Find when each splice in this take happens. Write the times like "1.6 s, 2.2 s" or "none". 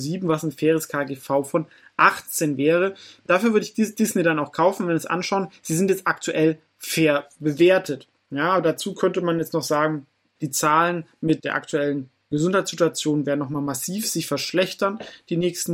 10.4 s, 11.4 s